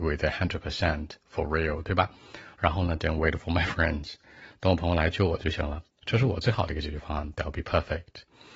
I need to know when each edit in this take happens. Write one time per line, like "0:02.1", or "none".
none